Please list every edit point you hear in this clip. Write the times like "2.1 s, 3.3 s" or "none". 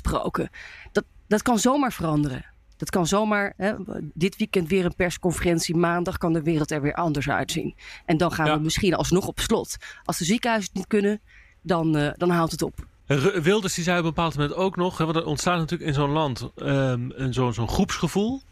none